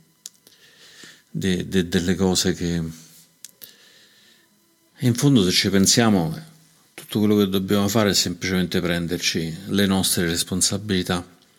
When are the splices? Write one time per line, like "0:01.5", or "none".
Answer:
0:04.9